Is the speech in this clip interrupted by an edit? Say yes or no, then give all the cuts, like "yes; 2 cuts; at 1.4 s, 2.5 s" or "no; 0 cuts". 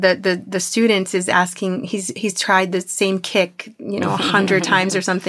no; 0 cuts